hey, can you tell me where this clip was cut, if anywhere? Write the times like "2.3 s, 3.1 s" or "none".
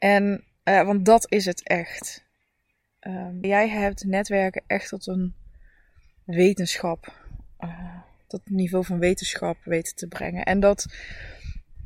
3.4 s